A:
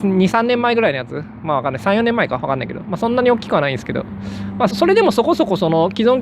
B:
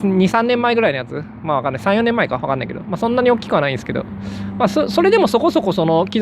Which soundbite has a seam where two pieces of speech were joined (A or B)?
A